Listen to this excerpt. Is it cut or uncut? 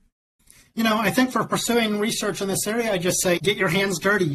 cut